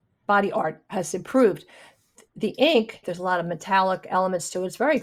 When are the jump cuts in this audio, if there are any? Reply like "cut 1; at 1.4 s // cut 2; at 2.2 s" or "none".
cut 1; at 3.0 s